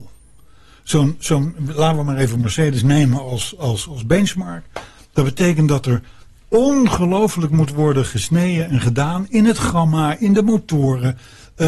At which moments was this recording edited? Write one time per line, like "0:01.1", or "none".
none